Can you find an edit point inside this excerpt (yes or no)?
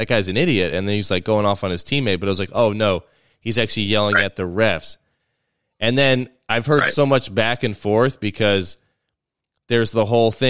no